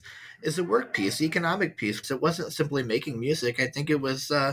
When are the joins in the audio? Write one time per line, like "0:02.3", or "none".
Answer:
0:02.0